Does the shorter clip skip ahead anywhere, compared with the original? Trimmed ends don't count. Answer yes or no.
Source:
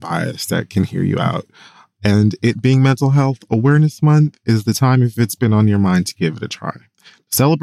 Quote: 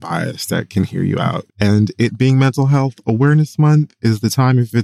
yes